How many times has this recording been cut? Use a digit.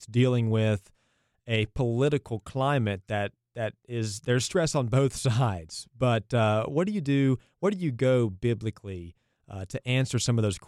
0